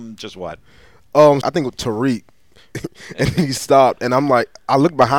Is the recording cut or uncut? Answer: cut